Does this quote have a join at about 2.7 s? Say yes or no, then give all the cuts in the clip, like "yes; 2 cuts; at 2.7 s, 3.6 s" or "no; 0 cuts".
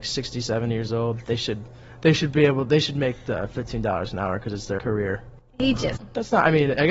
no; 1 cut; at 4.8 s